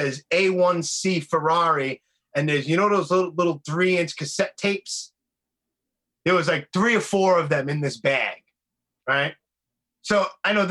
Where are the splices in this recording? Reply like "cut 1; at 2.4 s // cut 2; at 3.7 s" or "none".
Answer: none